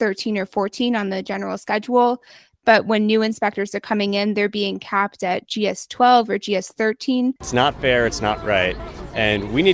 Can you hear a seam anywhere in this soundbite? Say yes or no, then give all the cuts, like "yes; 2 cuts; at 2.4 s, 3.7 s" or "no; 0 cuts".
yes; 1 cut; at 7.4 s